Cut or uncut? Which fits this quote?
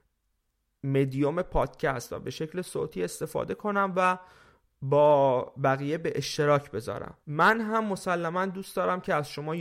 cut